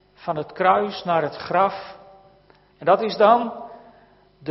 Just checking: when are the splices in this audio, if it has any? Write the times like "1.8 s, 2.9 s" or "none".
2.7 s